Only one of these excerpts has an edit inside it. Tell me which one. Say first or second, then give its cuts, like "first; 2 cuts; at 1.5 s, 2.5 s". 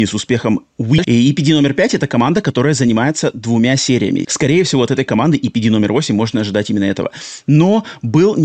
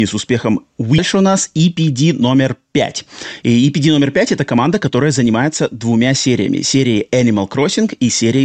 first; 2 cuts; at 1.0 s, 4.2 s